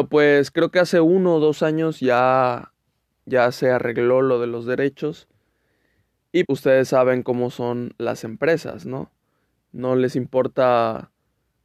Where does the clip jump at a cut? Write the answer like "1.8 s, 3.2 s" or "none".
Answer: 6.4 s